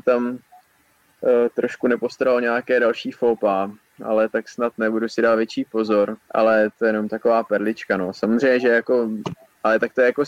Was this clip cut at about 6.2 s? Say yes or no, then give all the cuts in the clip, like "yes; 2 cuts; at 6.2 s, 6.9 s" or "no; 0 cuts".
yes; 1 cut; at 6.2 s